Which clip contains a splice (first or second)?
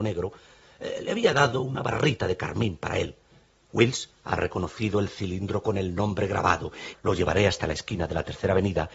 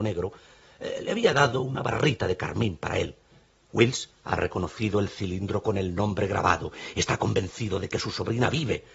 first